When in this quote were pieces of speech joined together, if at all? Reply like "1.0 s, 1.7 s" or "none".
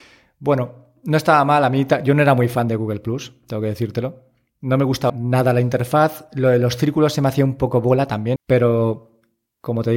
5.1 s, 8.4 s